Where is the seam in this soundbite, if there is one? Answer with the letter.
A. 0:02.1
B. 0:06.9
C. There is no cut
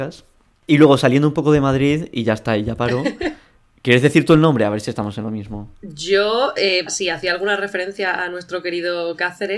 B